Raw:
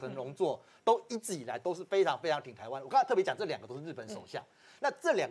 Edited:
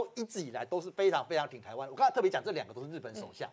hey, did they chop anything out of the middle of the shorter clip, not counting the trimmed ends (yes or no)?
no